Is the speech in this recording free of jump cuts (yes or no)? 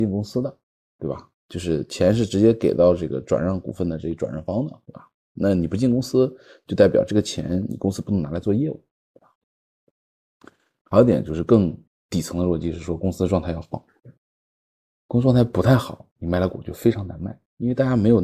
yes